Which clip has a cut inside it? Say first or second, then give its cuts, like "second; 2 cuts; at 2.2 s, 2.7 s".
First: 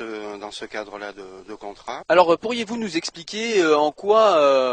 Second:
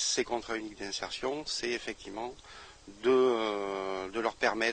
first; 1 cut; at 2.0 s